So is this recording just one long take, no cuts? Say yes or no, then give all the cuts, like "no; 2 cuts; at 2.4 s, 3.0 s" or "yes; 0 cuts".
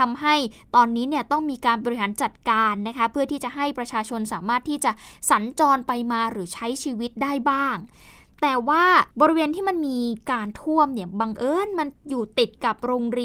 no; 1 cut; at 9.1 s